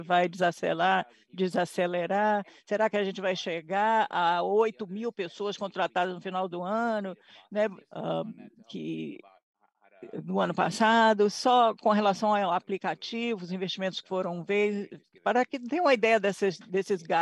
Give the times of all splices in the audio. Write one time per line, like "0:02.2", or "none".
0:07.8

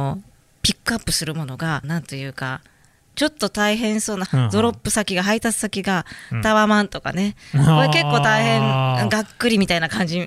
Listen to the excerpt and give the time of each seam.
0:01.8
0:04.3

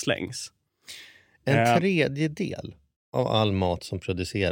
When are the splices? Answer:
none

